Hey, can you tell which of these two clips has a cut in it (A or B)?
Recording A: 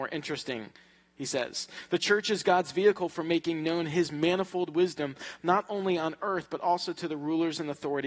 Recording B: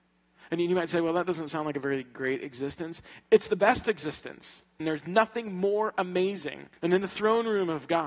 B